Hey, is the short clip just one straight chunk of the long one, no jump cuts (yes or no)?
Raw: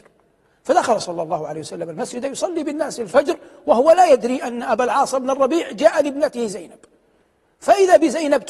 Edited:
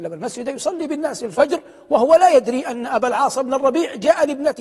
yes